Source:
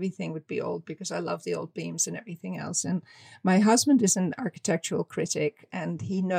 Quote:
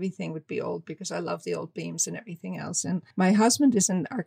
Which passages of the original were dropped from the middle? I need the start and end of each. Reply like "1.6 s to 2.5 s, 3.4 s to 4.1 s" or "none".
3.1 s to 3.4 s